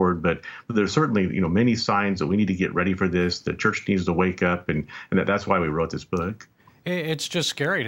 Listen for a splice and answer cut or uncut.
uncut